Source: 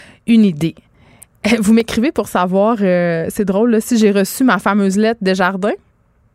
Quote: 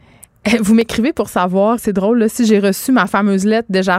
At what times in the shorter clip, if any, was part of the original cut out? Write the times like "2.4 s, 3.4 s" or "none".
1.8 s